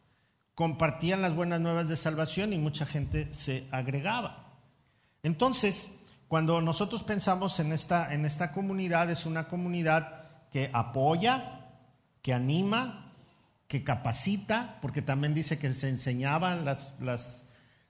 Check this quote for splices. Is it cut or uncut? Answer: uncut